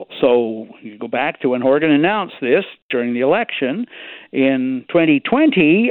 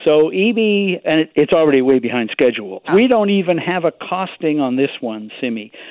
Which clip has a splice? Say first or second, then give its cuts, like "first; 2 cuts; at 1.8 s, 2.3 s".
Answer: second; 2 cuts; at 1.0 s, 2.9 s